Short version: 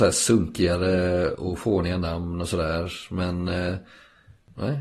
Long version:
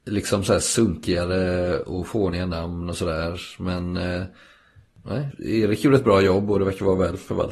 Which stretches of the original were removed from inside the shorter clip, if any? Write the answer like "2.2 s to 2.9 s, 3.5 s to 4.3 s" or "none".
none